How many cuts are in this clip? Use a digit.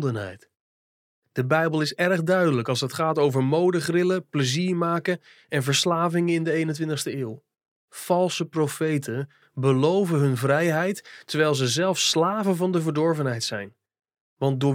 0